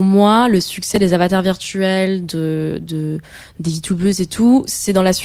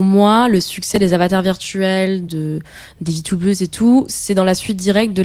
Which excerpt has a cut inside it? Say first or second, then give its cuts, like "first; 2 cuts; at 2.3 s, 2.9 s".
second; 1 cut; at 2.3 s